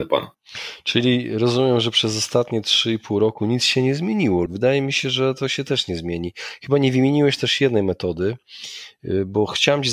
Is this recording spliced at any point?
yes; 1 cut; at 4.5 s

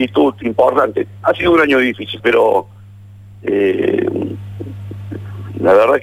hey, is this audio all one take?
no; 1 cut; at 2.2 s

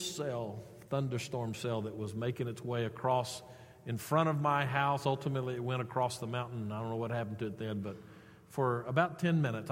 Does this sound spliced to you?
no; 0 cuts

